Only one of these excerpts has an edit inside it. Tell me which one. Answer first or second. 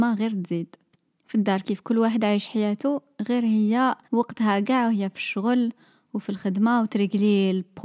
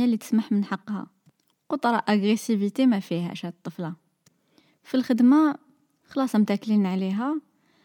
first